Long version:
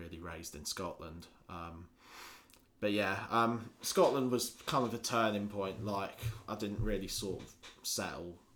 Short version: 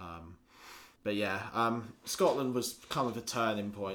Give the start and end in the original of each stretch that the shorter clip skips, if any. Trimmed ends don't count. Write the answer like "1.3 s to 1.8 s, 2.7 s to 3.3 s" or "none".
2.5 s to 2.7 s